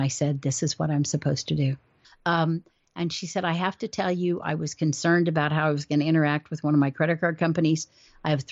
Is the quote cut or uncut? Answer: cut